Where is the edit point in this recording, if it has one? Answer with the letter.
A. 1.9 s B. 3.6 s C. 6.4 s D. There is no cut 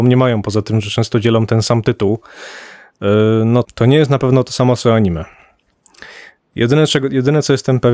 B